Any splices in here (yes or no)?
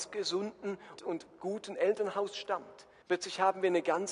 yes